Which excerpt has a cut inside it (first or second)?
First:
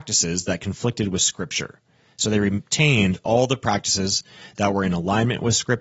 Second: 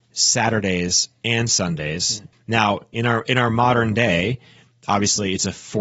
second